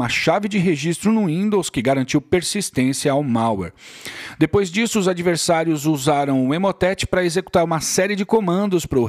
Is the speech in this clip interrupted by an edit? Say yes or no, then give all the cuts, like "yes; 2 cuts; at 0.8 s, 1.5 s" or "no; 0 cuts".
no; 0 cuts